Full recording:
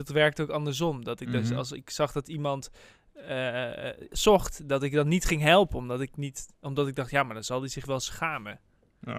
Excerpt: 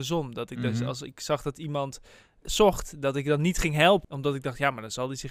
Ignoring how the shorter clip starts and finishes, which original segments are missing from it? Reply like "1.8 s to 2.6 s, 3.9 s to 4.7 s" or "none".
3.1 s to 4.1 s, 5.7 s to 6.6 s